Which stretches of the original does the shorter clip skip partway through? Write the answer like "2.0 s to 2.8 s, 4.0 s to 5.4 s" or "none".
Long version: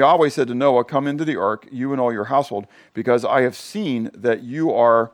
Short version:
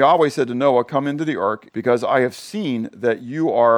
1.7 s to 2.9 s